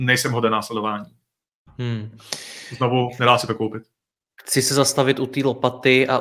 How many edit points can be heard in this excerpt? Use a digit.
0